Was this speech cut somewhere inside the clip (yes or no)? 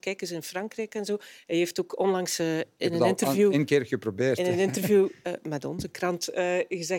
no